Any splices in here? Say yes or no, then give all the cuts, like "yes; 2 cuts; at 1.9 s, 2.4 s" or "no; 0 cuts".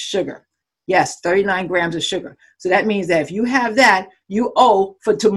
yes; 1 cut; at 4.2 s